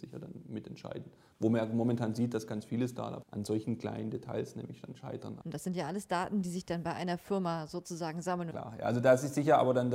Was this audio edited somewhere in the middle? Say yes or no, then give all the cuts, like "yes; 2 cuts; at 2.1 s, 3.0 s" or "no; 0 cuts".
yes; 3 cuts; at 3.2 s, 5.4 s, 8.5 s